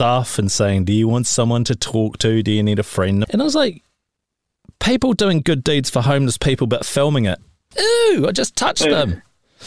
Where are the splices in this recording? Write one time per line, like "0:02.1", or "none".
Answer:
0:03.2
0:07.7